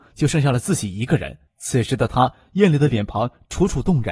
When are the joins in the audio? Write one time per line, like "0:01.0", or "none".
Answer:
0:01.5